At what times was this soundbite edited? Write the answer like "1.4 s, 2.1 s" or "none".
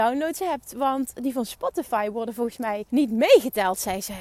2.9 s